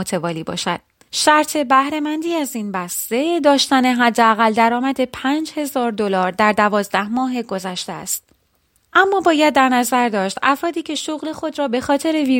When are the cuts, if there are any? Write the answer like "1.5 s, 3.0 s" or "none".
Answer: 1.0 s